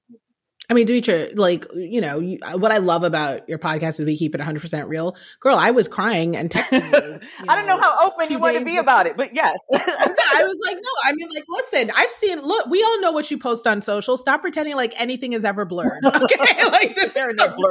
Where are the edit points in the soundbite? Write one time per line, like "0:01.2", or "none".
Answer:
none

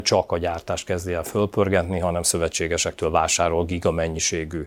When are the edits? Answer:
none

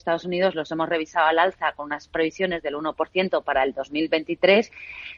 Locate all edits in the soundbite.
none

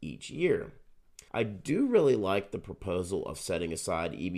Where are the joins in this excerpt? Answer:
0:01.3

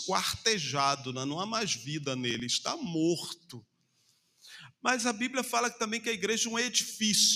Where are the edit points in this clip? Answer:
none

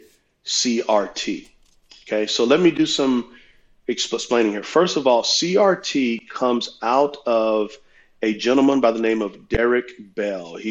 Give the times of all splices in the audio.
none

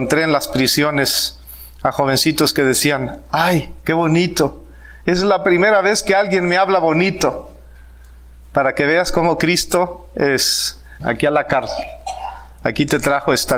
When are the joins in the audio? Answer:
0:11.0

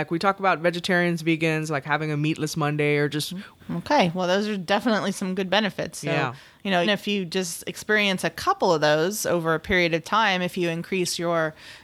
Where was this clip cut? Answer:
0:03.6
0:06.8

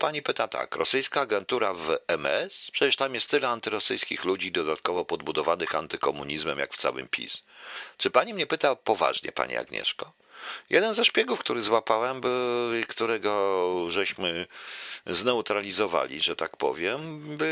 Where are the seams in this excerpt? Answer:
none

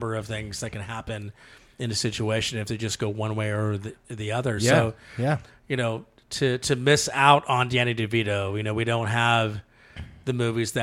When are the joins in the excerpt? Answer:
none

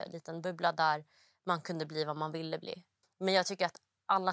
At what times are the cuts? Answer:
0:03.0

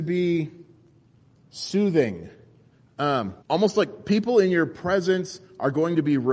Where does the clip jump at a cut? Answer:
0:03.4

